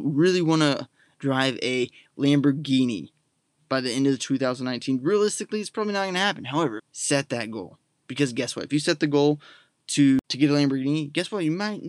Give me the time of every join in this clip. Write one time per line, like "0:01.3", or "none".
0:06.8